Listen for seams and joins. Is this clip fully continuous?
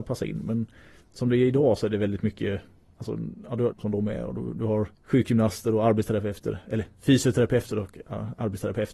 no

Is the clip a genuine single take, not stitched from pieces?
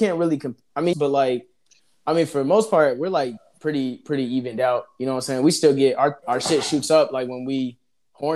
no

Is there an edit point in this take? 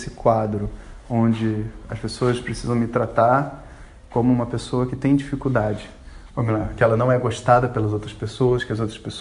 yes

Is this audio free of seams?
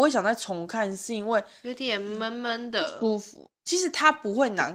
yes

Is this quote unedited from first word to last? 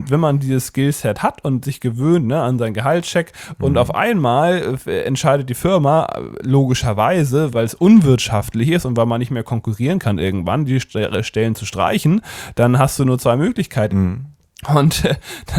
no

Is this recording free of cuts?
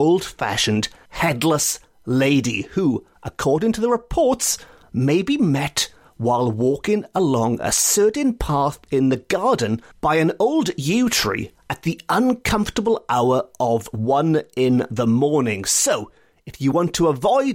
yes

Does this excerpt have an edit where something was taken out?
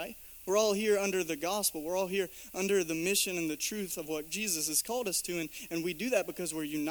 no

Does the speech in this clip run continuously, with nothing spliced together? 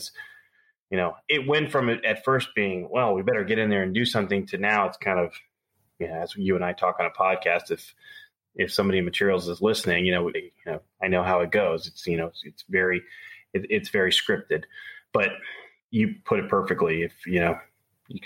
no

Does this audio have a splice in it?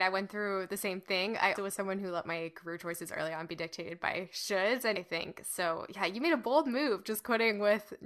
yes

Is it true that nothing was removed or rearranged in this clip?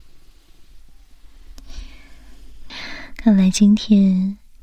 no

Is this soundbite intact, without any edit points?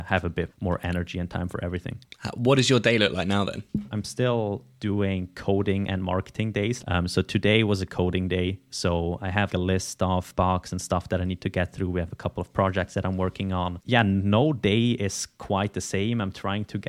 yes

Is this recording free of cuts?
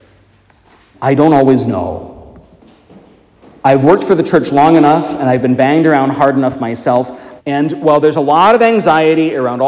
no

